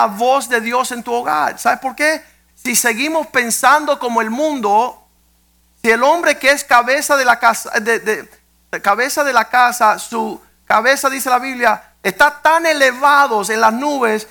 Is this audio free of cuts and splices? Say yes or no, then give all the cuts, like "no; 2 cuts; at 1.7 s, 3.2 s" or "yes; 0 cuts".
no; 3 cuts; at 2.5 s, 10.6 s, 12.0 s